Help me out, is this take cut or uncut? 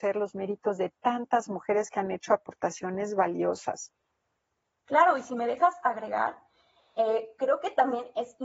uncut